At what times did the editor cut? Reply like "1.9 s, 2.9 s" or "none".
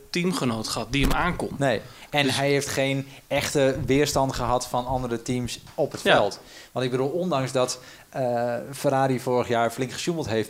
none